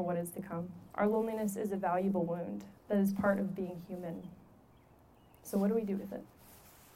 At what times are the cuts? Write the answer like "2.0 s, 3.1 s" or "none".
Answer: 0.9 s, 2.8 s

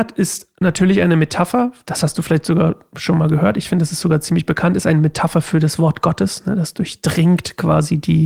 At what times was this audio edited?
none

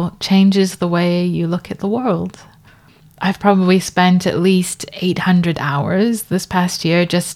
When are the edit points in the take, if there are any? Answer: none

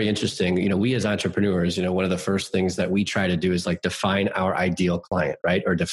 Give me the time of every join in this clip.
none

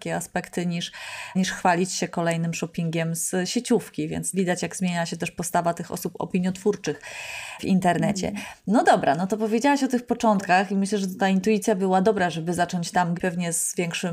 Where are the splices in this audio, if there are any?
11.8 s, 13.1 s

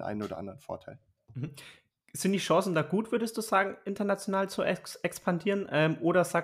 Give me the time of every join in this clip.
none

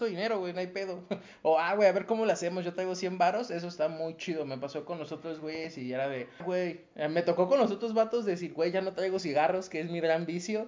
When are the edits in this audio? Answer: 6.4 s

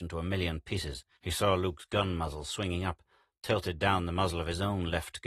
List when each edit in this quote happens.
1.2 s

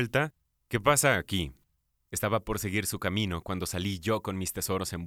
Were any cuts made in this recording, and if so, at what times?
1.9 s

